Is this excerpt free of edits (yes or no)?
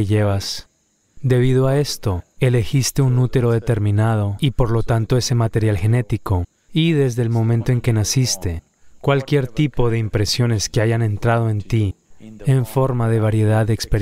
no